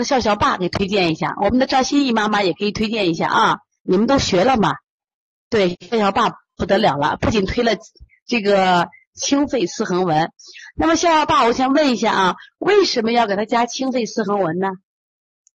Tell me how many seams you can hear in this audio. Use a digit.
1